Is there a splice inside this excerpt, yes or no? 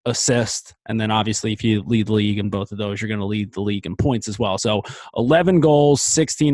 no